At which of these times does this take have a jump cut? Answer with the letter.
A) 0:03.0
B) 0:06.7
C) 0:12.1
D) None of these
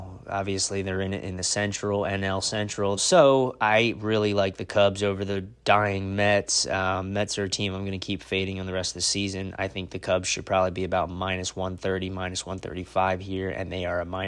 A